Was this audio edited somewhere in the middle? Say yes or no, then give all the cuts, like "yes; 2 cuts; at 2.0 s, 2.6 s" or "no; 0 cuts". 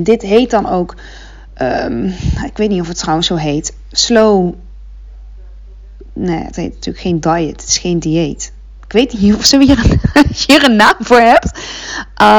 no; 0 cuts